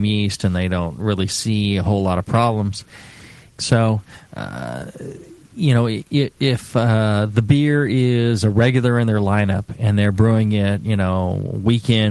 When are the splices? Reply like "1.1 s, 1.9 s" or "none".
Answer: 3.6 s

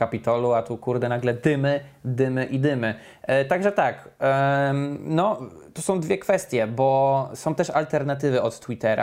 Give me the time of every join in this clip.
none

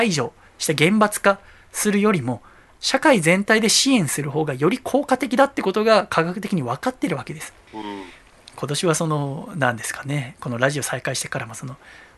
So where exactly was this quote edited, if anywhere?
7.7 s

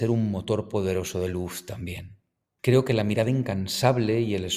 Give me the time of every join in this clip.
2.6 s

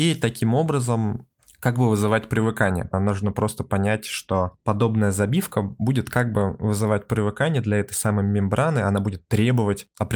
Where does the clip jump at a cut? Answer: 2.9 s

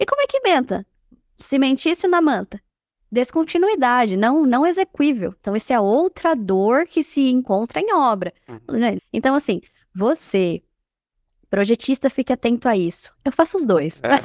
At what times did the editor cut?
9.0 s, 13.2 s

